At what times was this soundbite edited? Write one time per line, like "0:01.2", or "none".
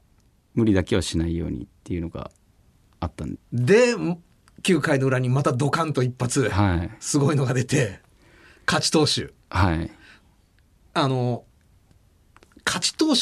0:03.4